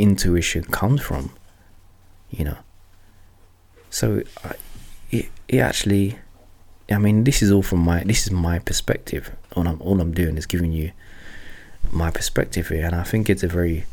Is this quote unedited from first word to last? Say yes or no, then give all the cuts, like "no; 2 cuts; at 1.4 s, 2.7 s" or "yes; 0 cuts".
yes; 0 cuts